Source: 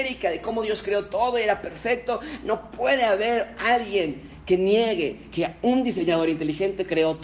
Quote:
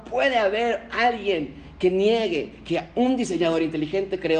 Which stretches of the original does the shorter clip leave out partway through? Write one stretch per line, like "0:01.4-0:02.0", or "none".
none